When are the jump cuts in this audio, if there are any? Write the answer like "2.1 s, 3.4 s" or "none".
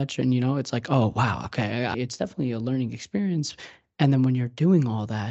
1.9 s

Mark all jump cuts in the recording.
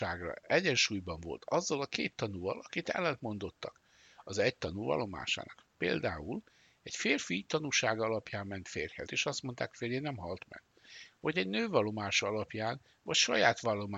9.1 s

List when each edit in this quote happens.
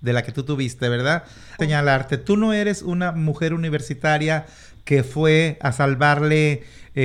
1.6 s

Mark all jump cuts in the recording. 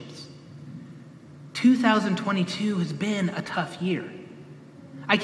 none

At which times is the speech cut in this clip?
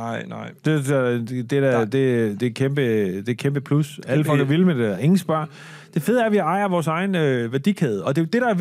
none

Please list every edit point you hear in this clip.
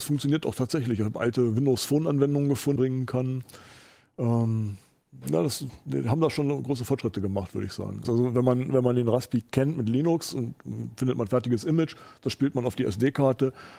2.8 s, 8.0 s

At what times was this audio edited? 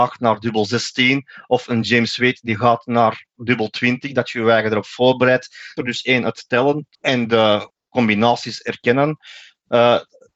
5.8 s, 6.9 s

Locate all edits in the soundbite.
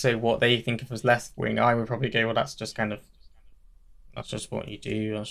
none

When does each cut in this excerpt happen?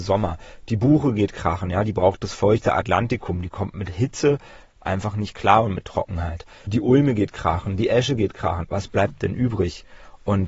none

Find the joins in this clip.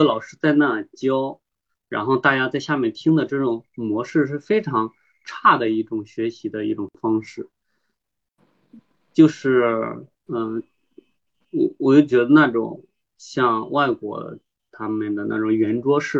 10.1 s

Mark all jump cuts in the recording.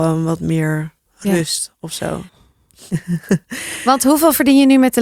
1.1 s, 2.3 s

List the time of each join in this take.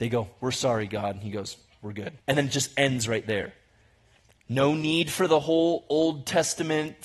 2.2 s

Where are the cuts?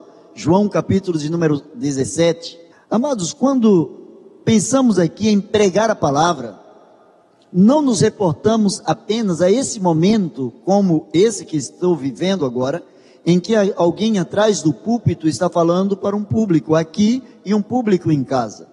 2.7 s

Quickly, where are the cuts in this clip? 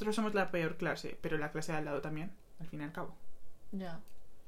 2.6 s

